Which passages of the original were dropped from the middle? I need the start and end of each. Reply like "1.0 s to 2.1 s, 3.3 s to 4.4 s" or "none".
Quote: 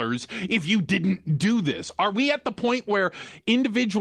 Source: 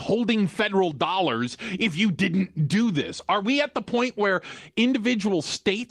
none